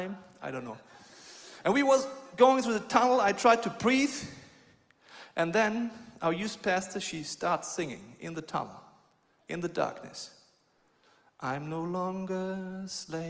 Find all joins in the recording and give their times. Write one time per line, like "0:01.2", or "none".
none